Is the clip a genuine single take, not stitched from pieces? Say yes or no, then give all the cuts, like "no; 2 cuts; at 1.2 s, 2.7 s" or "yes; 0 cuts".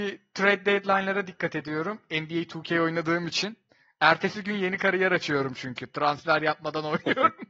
yes; 0 cuts